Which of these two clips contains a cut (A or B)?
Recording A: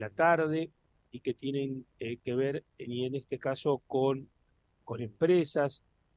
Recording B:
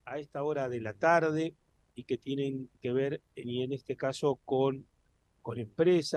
B